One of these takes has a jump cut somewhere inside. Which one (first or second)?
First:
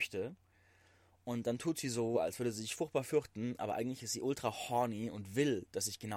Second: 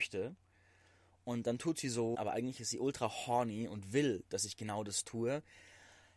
second